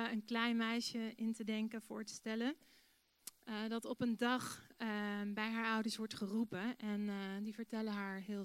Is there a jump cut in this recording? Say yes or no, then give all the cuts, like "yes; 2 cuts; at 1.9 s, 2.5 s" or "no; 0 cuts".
no; 0 cuts